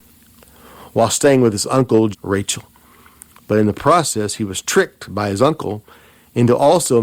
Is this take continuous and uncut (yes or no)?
no